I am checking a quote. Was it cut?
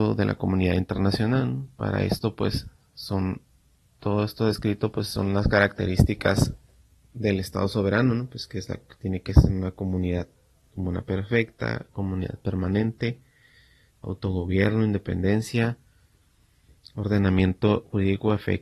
no; 0 cuts

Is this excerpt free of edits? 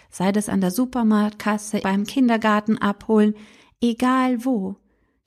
no; 1 cut; at 1.8 s

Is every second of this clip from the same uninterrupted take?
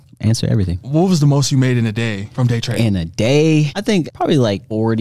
yes; 0 cuts

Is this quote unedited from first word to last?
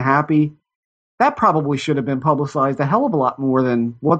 yes; 0 cuts

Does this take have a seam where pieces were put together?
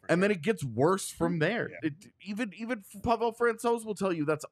yes; 2 cuts; at 1.8 s, 3.0 s

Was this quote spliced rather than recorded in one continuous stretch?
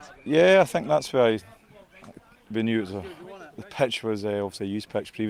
no; 0 cuts

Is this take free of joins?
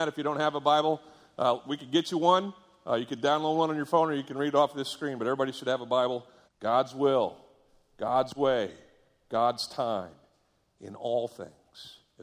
no; 1 cut; at 6.5 s

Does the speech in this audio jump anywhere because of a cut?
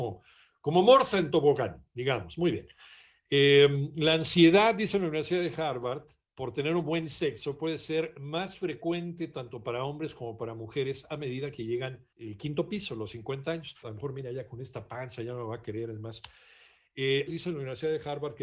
yes; 2 cuts; at 13.8 s, 17.3 s

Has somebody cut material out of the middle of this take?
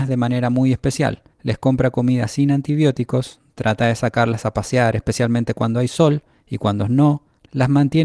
yes; 1 cut; at 1.3 s

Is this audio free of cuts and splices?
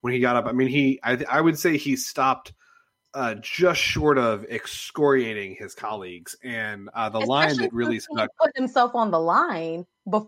yes; 0 cuts

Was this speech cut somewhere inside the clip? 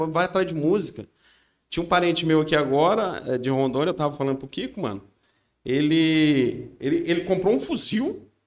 no; 0 cuts

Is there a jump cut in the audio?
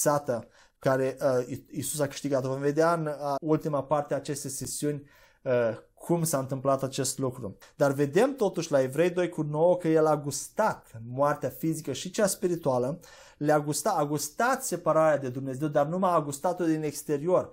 yes; 1 cut; at 3.4 s

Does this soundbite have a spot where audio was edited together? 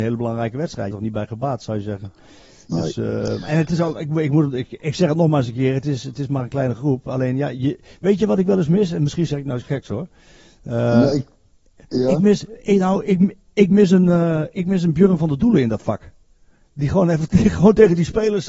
yes; 1 cut; at 0.9 s

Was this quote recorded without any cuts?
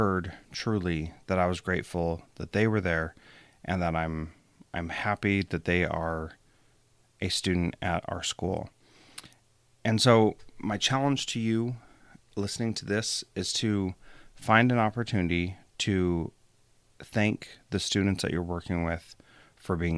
yes; 0 cuts

